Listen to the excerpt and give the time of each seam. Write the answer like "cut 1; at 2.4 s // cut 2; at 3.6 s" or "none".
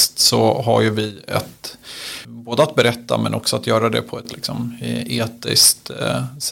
cut 1; at 2.2 s